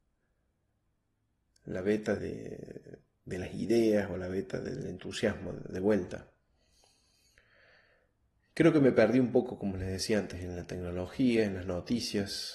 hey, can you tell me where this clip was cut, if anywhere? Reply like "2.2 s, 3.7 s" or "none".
2.2 s